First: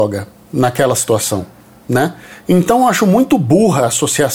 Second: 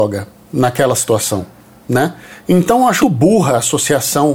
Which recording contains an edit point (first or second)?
second